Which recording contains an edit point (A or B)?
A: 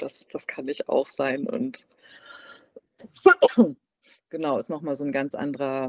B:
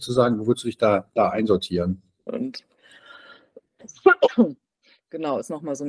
B